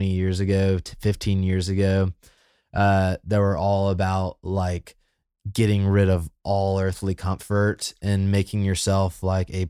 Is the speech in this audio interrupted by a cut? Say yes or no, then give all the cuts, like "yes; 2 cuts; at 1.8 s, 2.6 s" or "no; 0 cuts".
no; 0 cuts